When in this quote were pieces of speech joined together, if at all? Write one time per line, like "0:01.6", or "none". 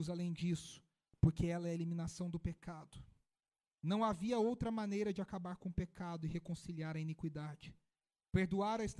none